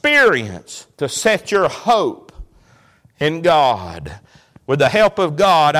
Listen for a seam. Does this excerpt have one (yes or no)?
yes